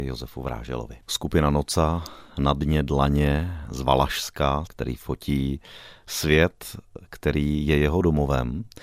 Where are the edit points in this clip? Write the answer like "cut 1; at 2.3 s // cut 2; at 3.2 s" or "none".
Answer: cut 1; at 1.0 s // cut 2; at 4.7 s